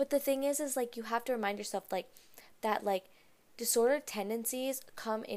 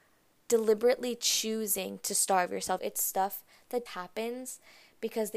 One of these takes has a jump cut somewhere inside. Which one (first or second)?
second